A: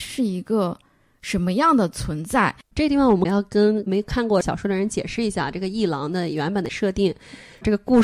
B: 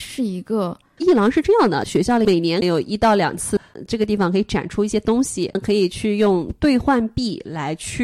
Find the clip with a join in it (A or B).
B